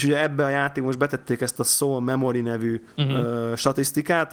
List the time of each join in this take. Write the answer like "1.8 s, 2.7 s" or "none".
2.9 s

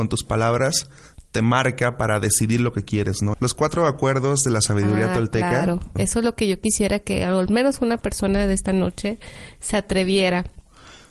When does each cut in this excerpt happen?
3.3 s, 6.0 s

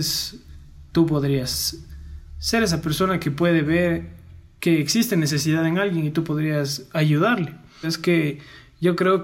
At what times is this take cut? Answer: 7.8 s

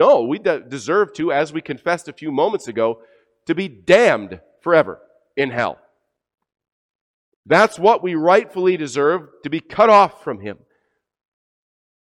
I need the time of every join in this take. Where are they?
none

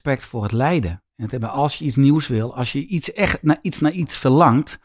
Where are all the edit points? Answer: none

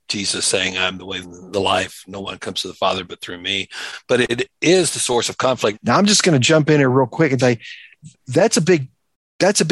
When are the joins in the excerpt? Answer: 1.2 s, 5.7 s, 7.4 s

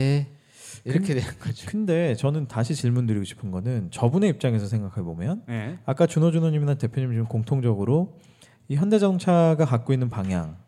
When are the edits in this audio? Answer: none

